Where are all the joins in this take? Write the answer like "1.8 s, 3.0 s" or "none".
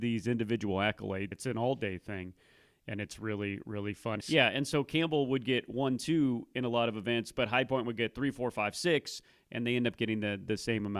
1.3 s, 4.2 s